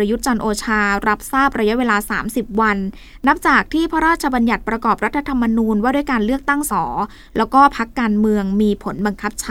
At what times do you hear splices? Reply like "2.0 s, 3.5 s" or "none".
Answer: 6.7 s